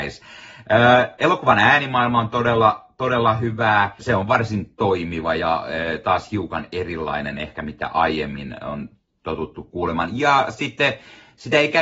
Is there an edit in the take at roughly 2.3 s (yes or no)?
no